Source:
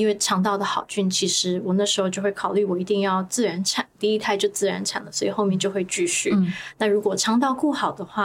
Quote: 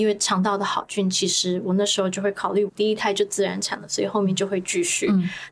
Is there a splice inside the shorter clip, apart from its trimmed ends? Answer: yes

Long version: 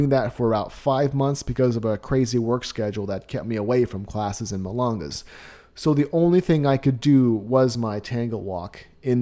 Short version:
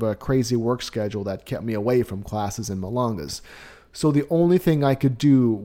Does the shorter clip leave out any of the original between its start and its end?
no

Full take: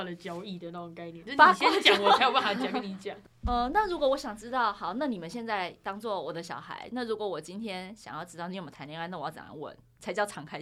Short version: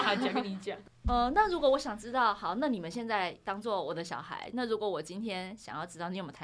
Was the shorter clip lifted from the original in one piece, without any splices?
yes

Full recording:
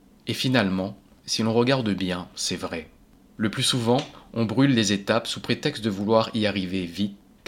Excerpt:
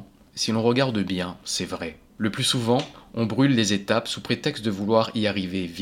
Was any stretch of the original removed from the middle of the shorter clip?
yes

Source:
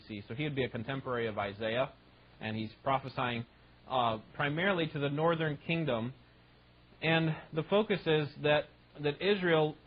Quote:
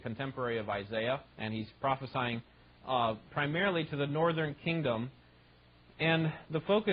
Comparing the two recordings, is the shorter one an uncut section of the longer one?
no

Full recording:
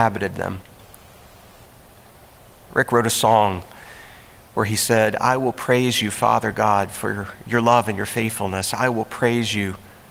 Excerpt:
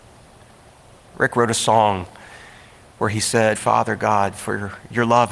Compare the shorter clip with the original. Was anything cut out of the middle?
yes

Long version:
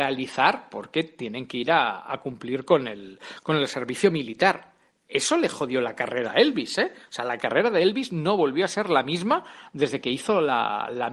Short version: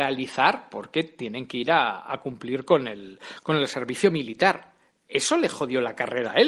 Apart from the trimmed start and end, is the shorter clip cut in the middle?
no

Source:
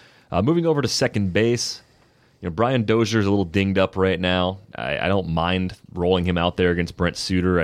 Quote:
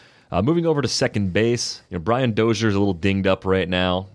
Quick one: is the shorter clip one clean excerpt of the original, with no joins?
no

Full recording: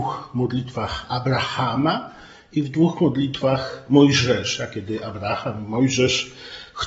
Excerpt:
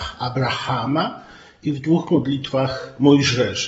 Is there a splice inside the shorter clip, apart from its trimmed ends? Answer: no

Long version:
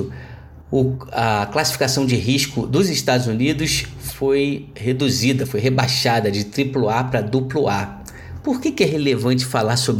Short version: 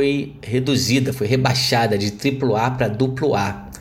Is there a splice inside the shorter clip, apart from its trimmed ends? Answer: no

